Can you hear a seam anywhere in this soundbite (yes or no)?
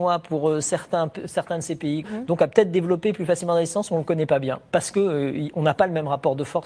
yes